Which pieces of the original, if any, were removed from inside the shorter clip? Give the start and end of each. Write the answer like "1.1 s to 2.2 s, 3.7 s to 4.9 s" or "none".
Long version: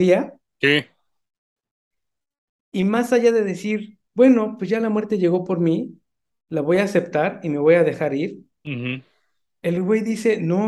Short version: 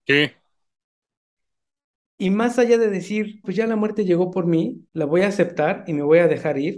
4.0 s to 4.6 s, 6.0 s to 6.4 s